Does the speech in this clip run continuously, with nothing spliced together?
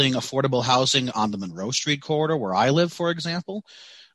yes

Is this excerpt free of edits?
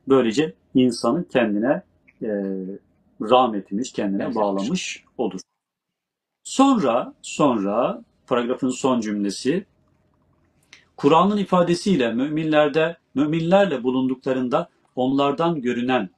yes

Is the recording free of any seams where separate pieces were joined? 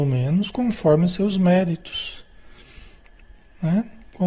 yes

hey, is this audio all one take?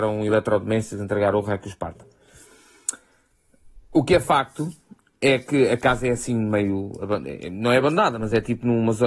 yes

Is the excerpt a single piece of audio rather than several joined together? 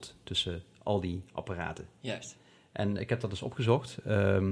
yes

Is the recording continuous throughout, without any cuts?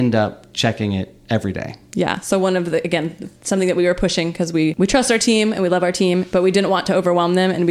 yes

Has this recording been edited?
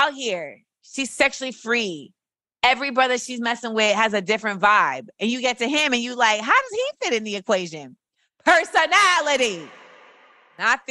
no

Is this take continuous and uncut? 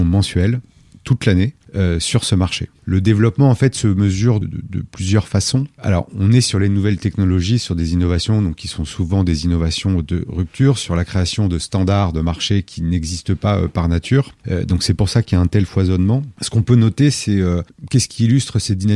no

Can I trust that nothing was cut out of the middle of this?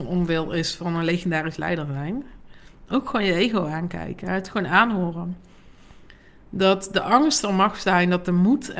yes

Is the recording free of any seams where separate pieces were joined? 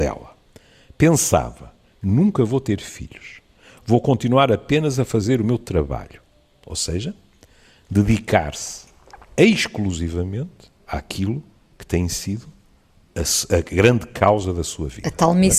no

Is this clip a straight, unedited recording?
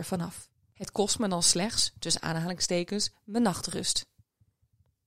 yes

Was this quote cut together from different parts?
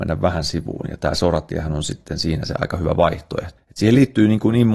yes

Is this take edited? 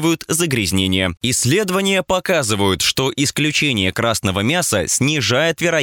yes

